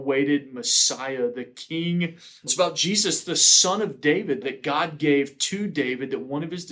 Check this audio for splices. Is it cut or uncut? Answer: cut